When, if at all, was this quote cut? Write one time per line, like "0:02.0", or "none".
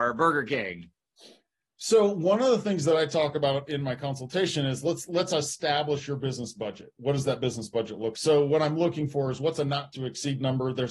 0:08.1